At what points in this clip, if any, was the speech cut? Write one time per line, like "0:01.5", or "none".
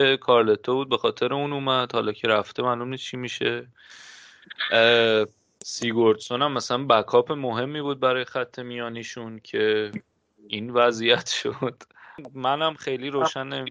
none